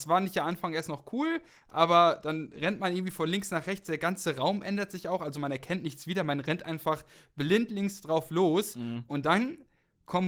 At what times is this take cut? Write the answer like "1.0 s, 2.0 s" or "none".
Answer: none